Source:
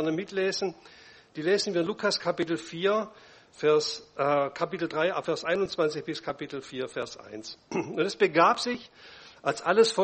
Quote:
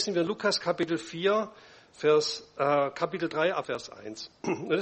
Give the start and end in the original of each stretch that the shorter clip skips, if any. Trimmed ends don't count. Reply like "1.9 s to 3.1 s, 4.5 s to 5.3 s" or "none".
5.2 s to 6.9 s